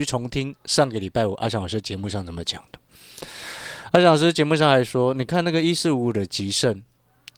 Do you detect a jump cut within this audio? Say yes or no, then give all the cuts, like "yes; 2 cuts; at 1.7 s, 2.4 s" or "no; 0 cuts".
no; 0 cuts